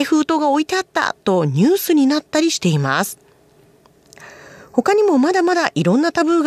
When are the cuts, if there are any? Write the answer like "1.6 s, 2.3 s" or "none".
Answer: none

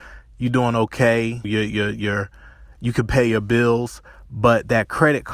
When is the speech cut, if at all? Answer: 1.4 s

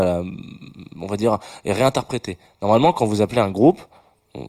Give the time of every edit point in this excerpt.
none

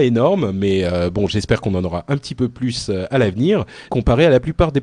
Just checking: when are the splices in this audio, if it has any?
3.9 s

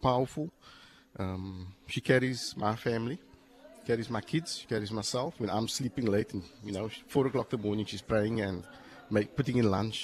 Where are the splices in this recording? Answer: none

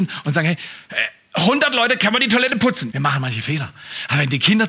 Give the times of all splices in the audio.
2.9 s

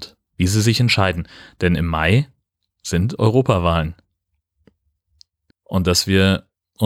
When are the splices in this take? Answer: 5.5 s

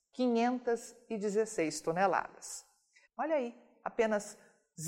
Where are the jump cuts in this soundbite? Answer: 3.0 s

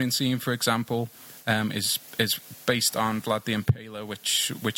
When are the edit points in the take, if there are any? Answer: none

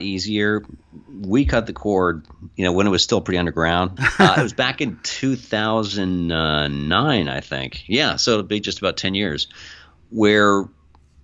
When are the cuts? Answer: 4.0 s

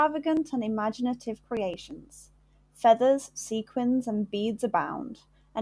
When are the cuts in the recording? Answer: none

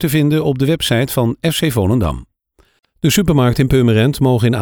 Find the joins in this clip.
none

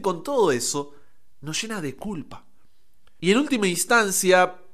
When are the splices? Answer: 3.2 s

